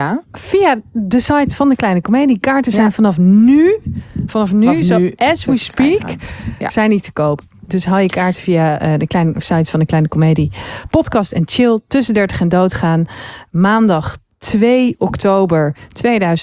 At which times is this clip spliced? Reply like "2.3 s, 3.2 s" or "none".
none